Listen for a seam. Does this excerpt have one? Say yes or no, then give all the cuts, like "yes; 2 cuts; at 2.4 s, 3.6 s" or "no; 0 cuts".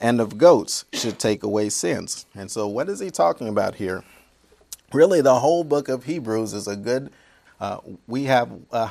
yes; 1 cut; at 7.4 s